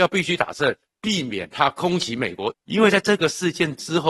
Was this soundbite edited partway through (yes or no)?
yes